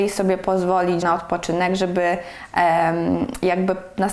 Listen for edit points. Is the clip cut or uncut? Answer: cut